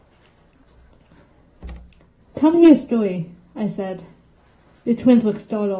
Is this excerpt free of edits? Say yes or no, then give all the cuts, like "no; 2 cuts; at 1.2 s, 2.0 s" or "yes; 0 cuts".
yes; 0 cuts